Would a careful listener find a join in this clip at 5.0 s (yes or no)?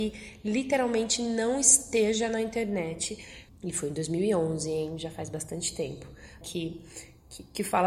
no